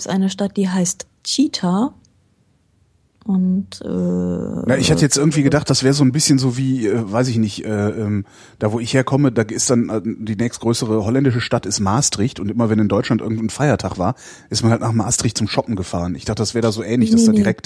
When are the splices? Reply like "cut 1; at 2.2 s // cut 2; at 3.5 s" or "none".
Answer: none